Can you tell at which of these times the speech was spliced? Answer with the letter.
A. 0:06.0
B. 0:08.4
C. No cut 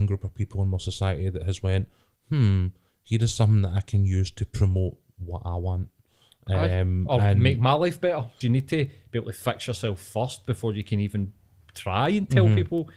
B